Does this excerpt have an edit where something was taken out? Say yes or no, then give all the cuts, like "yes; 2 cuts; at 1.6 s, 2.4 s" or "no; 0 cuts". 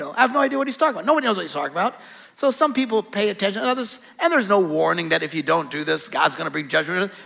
no; 0 cuts